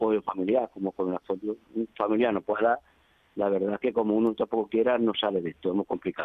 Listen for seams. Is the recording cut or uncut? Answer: uncut